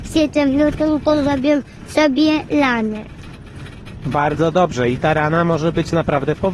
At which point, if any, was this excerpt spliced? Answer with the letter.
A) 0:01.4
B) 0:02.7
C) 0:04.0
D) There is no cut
D